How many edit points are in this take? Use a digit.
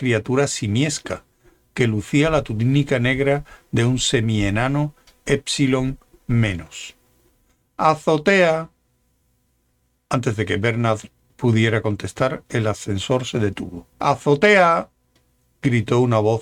2